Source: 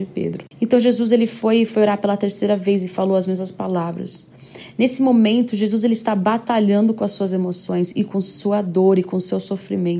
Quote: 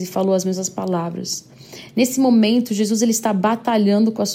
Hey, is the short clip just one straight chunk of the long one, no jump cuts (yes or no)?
yes